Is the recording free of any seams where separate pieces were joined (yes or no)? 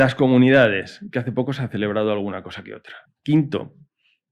no